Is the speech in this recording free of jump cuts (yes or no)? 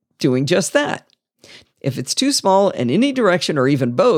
no